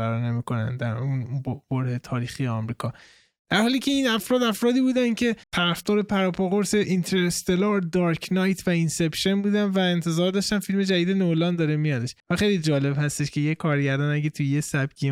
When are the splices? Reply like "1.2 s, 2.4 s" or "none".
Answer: 5.4 s, 12.2 s